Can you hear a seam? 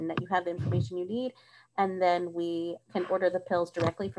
no; 0 cuts

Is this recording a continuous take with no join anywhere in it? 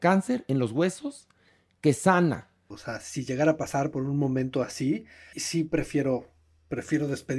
no; 2 cuts; at 2.7 s, 5.3 s

